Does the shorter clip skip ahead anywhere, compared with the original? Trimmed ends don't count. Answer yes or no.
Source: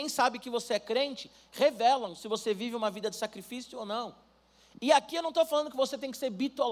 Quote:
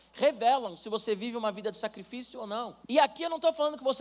yes